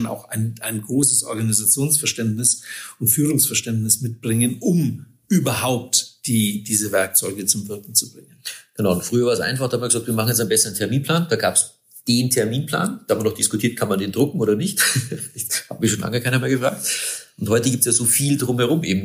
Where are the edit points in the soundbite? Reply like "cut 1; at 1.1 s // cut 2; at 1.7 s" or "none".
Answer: none